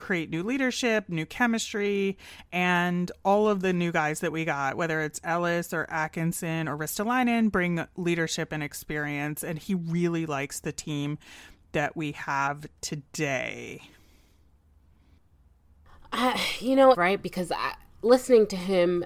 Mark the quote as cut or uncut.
cut